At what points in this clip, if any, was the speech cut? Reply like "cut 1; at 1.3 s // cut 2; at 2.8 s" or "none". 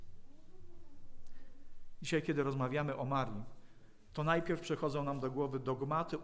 none